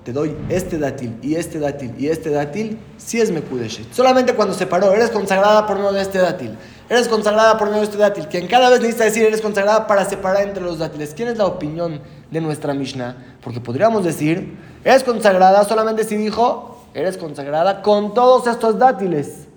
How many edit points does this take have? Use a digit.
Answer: 0